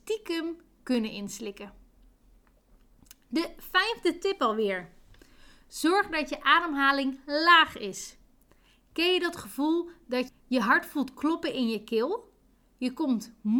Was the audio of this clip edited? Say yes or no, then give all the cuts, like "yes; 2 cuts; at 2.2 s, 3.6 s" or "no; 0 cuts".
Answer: yes; 1 cut; at 10.3 s